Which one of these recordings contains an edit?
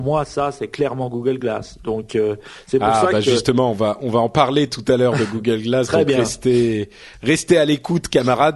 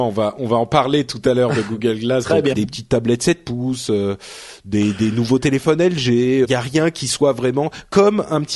second; 2 cuts; at 2.5 s, 6.4 s

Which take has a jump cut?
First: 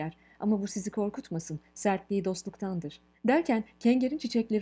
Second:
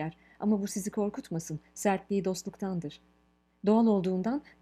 first; 1 cut; at 3.1 s

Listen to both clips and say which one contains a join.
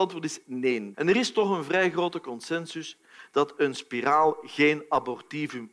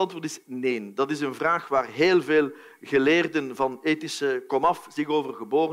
first; 1 cut; at 0.9 s

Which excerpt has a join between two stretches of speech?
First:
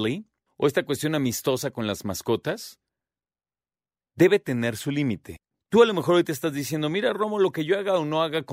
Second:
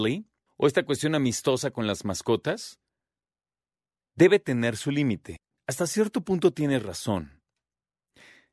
second; 1 cut; at 5.6 s

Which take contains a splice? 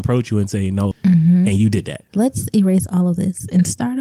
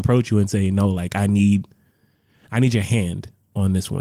first; 2 cuts; at 0.9 s, 2.1 s

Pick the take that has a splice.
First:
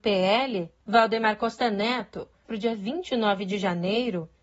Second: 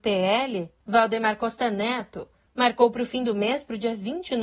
first; 1 cut; at 2.5 s

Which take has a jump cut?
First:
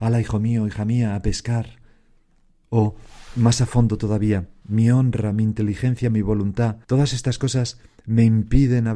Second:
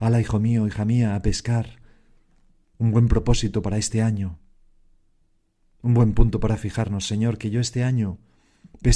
first; 3 cuts; at 2.6 s, 4.6 s, 6.8 s

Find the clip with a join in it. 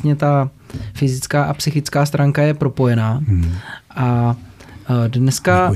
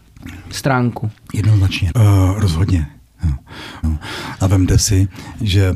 second; 2 cuts; at 1.9 s, 3.8 s

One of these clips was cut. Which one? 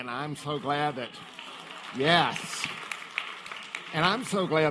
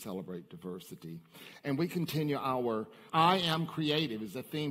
second; 1 cut; at 3.1 s

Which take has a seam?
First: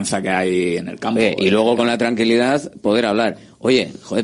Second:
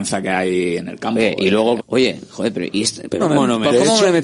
second; 2 cuts; at 1.8 s, 3.2 s

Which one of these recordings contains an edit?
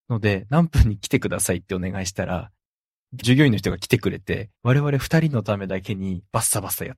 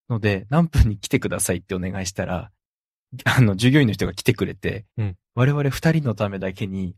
first; 2 cuts; at 3.2 s, 4.6 s

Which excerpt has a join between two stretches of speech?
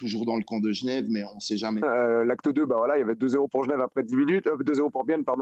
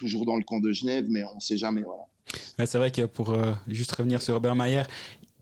first; 1 cut; at 1.8 s

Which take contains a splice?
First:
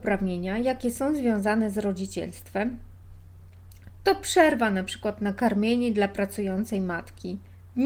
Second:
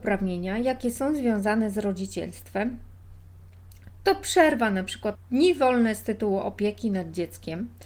second; 1 cut; at 5.2 s

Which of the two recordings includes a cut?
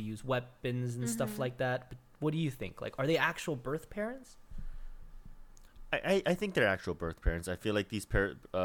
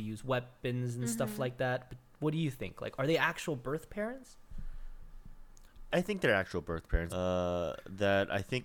second; 2 cuts; at 5.9 s, 7.1 s

